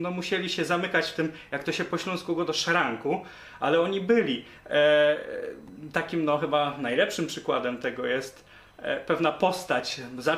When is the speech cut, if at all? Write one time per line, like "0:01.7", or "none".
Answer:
none